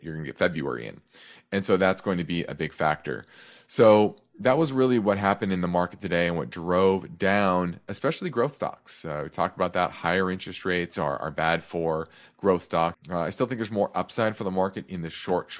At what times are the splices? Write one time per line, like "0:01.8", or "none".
0:12.9